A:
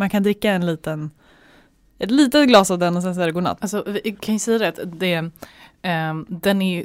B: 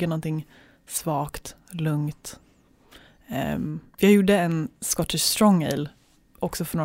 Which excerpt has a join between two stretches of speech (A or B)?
A